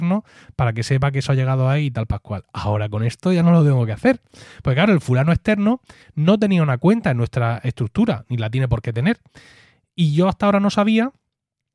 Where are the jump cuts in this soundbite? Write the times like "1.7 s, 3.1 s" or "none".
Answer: none